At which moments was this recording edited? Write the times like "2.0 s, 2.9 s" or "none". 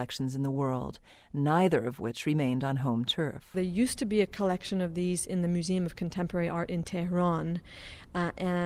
none